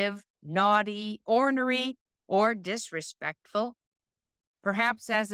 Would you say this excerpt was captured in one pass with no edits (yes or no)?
yes